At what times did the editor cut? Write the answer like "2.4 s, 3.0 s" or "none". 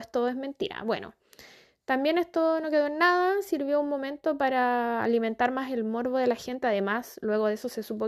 none